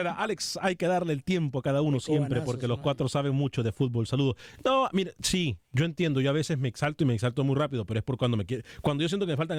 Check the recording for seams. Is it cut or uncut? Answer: uncut